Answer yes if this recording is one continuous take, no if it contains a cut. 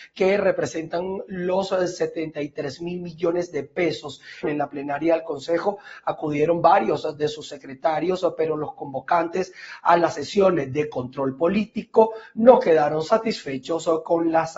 no